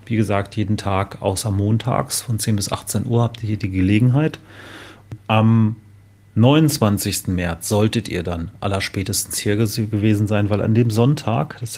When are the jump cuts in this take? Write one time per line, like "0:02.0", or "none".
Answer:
0:05.2